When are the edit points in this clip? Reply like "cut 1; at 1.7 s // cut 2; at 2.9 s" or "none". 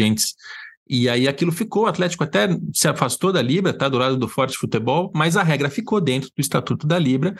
none